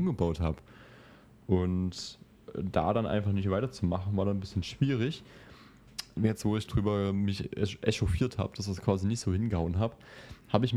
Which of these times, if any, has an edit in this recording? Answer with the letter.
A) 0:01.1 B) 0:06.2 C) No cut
B